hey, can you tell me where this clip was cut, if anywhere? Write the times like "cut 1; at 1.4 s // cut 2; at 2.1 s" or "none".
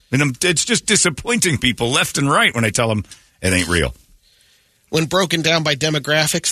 none